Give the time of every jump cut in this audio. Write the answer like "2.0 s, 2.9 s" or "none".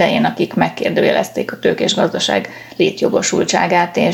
none